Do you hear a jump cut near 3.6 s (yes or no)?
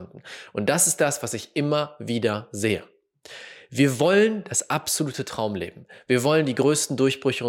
no